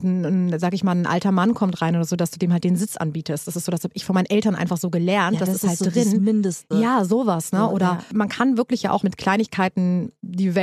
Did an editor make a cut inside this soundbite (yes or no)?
no